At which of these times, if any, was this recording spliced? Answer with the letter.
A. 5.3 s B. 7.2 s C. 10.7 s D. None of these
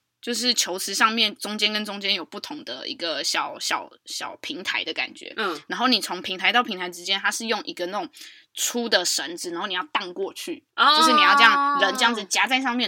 C